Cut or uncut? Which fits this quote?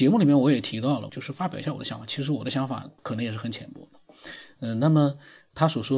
cut